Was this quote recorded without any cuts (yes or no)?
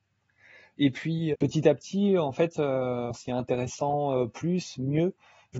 no